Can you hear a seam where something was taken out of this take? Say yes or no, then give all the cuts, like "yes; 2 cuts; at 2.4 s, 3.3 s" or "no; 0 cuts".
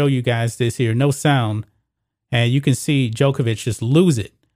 no; 0 cuts